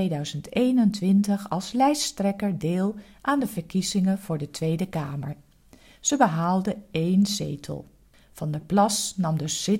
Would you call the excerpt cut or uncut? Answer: uncut